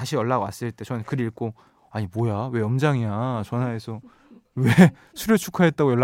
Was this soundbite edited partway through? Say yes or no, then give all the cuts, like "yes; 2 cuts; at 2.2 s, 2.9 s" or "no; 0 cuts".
no; 0 cuts